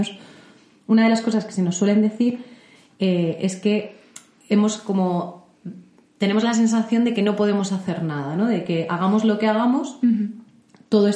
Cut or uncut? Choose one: uncut